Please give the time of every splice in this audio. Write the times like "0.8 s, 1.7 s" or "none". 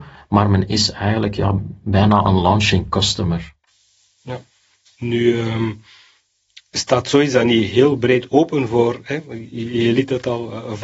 none